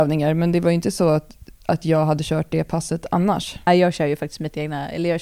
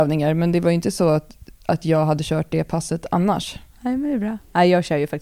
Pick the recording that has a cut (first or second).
first